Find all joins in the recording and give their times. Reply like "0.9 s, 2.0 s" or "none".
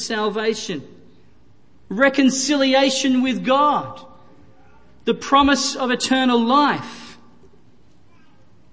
1.8 s